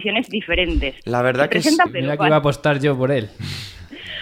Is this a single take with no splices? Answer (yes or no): no